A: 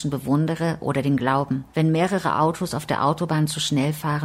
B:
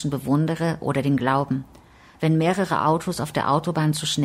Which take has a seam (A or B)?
A